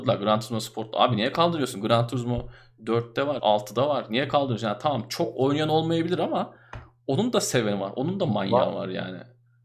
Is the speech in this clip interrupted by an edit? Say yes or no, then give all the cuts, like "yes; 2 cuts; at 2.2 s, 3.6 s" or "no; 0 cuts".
yes; 1 cut; at 3.4 s